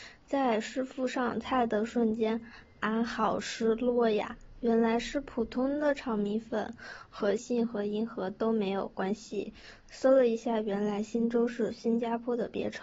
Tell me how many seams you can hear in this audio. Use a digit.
1